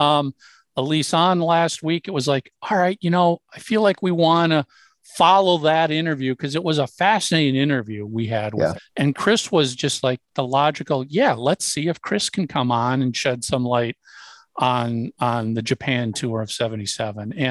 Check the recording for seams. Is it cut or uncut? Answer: cut